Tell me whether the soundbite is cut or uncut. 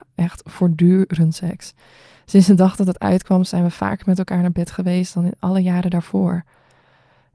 uncut